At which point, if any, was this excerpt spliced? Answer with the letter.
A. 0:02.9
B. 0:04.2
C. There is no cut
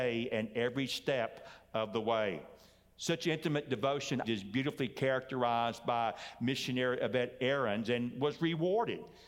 B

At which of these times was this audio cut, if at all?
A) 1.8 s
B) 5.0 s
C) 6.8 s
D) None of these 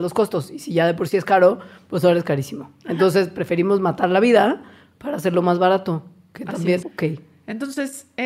C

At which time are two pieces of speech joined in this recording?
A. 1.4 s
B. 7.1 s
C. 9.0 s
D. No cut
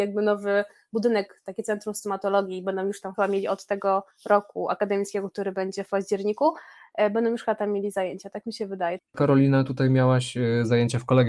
C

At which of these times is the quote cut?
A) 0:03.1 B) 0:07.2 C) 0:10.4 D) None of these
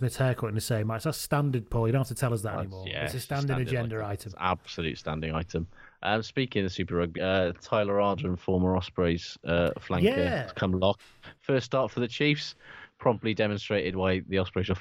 B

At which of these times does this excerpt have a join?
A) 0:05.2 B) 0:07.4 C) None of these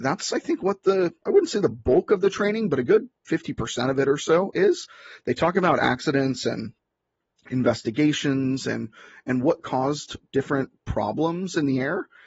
C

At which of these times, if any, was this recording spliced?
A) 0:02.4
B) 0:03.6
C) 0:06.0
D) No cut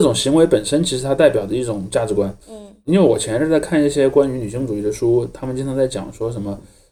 A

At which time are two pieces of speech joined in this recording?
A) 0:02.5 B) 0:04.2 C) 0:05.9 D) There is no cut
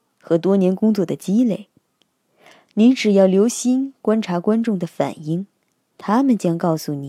D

